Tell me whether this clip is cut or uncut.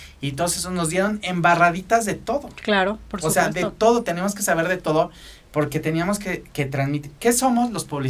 cut